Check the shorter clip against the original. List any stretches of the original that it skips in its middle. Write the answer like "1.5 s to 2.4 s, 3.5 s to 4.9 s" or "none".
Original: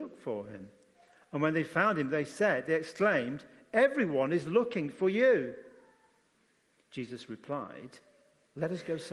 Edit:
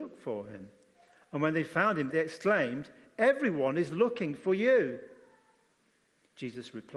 2.1 s to 2.6 s